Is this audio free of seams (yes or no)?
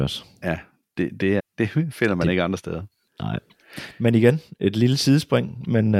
no